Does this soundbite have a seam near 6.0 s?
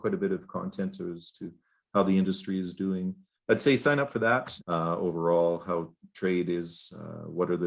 no; 2 cuts; at 3.4 s, 4.6 s

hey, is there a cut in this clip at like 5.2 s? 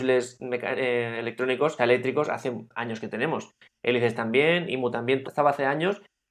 yes; 2 cuts; at 1.8 s, 5.2 s

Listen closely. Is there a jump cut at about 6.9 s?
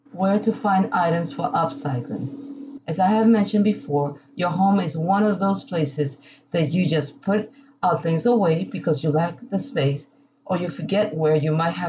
no; 1 cut; at 2.8 s

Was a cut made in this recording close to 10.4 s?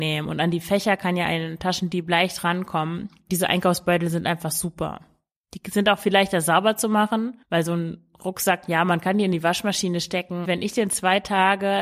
yes; 1 cut; at 10.4 s

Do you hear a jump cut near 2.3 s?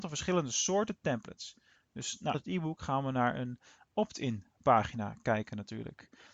yes; 1 cut; at 2.3 s

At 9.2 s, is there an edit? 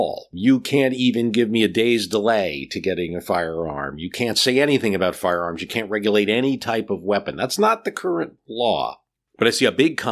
yes; 1 cut; at 9.2 s

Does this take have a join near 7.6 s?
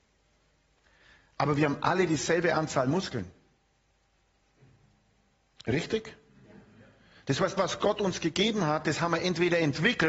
yes; 1 cut; at 7.6 s

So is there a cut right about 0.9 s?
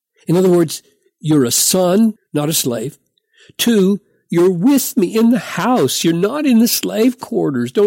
no; 1 cut; at 2.2 s

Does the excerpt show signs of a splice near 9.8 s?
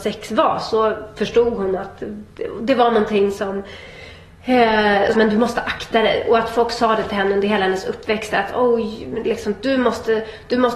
no; 1 cut; at 5.1 s

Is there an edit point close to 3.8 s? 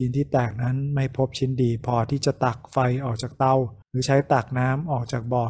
yes; 1 cut; at 3.8 s

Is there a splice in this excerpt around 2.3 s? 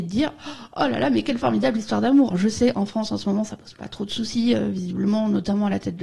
yes; 1 cut; at 2.3 s

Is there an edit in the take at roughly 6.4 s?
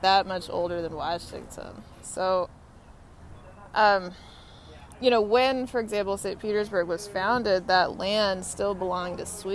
no; 1 cut; at 1.9 s

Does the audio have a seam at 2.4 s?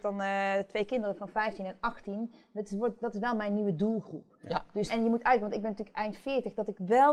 no; 1 cut; at 4.9 s

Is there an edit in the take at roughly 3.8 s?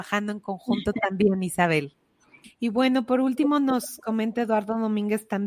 no; 1 cut; at 2.4 s

